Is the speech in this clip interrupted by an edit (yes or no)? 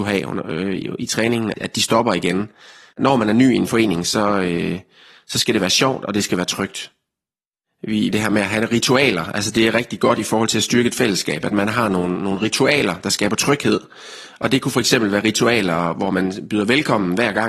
yes